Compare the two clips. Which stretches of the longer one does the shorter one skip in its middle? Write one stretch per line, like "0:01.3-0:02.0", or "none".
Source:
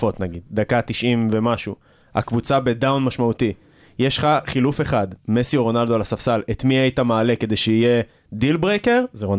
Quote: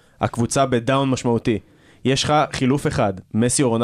none